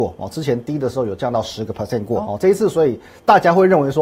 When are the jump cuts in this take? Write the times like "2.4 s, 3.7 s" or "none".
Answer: 2.2 s

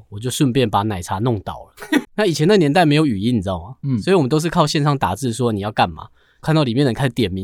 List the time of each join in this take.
2.0 s

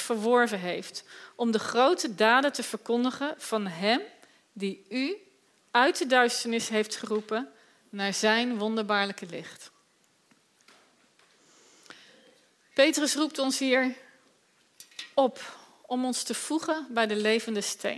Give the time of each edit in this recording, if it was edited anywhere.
none

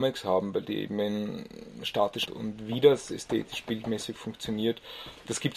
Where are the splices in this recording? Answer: 2.3 s

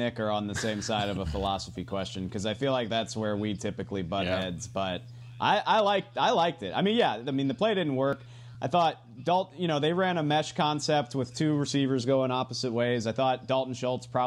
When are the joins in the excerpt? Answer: none

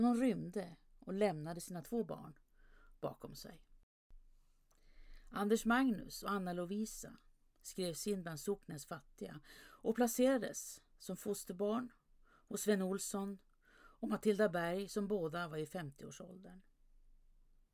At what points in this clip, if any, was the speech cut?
none

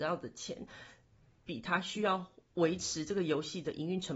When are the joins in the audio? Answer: none

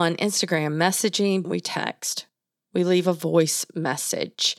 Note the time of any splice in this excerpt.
1.4 s

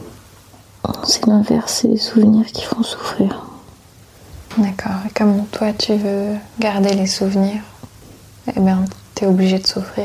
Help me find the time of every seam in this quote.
none

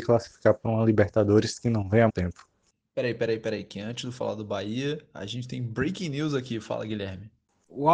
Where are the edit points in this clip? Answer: 2.1 s

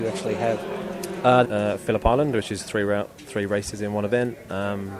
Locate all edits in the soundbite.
1.4 s

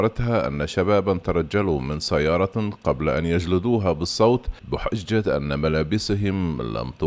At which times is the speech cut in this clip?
4.6 s

